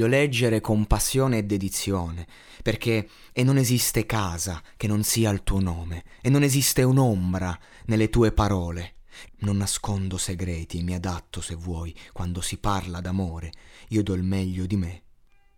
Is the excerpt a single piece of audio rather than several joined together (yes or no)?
no